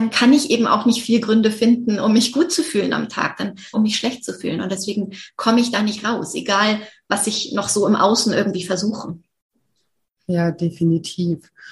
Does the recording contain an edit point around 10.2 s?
no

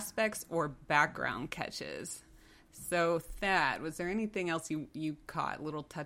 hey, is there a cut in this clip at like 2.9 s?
no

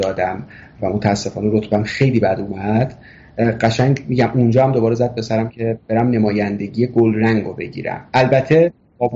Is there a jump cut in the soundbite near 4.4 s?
no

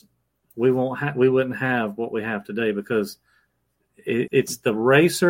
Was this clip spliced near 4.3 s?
yes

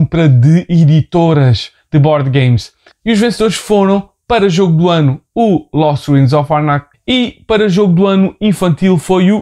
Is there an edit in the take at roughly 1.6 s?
no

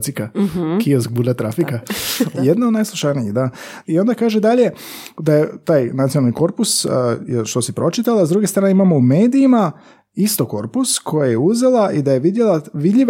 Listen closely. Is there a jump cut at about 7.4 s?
no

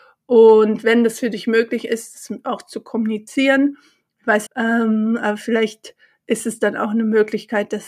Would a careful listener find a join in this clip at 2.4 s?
no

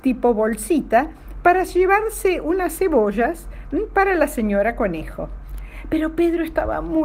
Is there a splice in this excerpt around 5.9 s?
no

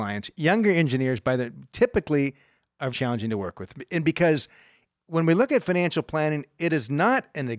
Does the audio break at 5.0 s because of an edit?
no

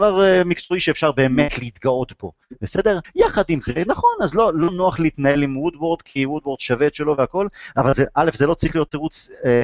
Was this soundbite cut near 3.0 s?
yes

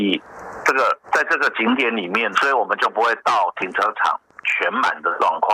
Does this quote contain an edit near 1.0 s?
yes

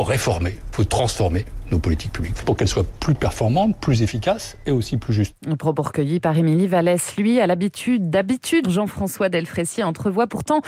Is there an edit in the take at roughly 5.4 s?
no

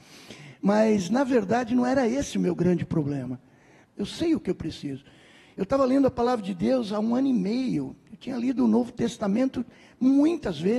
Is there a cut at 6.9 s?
no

